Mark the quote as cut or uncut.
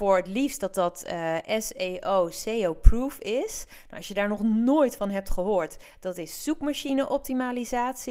uncut